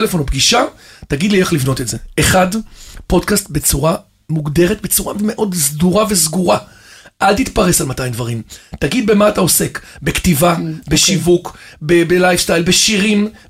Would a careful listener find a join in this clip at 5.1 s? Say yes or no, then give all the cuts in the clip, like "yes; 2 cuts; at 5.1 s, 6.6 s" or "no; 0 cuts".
yes; 1 cut; at 5.1 s